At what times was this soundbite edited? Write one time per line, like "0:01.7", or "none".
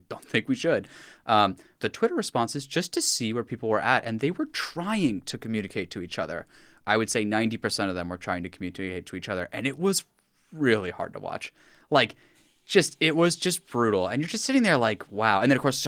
0:01.8